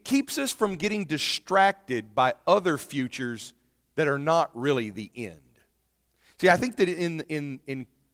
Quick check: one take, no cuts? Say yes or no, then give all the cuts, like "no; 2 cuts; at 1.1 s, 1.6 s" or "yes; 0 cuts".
yes; 0 cuts